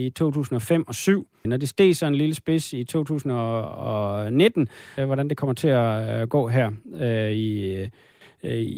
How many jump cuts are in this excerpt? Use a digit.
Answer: 2